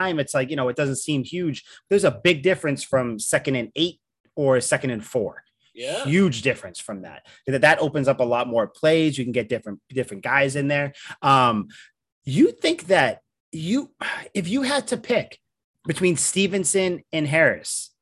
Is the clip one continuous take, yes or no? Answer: yes